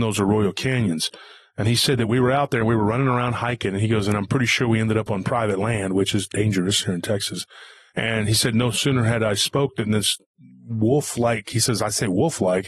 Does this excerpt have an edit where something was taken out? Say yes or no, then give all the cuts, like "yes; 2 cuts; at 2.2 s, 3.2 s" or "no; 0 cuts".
yes; 1 cut; at 7.9 s